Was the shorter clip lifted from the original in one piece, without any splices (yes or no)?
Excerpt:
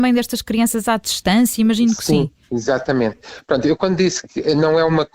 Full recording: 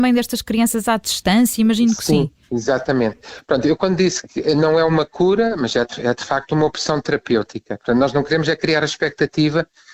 yes